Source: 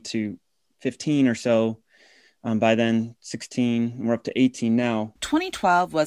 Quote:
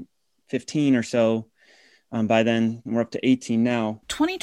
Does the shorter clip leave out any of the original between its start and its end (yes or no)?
yes